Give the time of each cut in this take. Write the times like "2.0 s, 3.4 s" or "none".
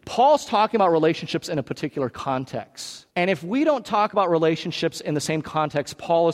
3.1 s